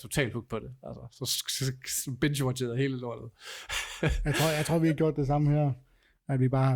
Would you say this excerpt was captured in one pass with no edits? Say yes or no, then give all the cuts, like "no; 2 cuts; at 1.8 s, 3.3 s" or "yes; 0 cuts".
yes; 0 cuts